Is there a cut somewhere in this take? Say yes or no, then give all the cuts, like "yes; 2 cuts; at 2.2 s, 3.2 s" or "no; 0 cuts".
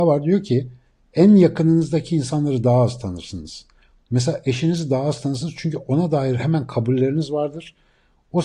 no; 0 cuts